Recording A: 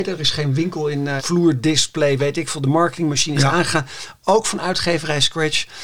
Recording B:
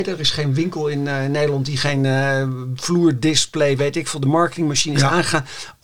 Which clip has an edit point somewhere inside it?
A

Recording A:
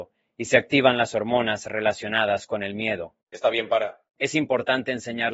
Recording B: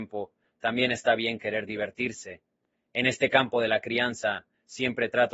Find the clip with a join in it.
A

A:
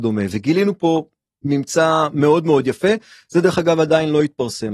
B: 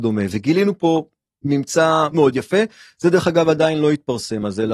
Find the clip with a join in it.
B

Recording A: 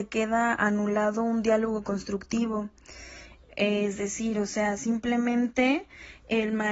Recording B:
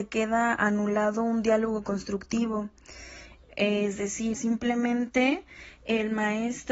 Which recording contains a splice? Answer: B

